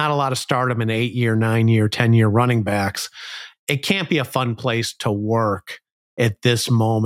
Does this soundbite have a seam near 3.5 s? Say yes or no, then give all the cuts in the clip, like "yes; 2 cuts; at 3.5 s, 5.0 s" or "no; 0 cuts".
yes; 1 cut; at 3.5 s